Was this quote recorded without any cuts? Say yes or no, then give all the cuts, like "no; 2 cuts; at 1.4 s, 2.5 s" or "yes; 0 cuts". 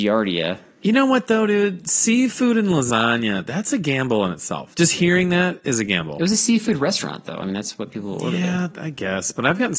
yes; 0 cuts